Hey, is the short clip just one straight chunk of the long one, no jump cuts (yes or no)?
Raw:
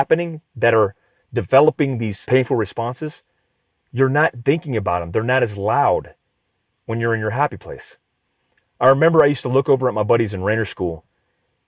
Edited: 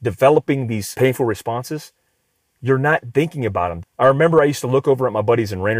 no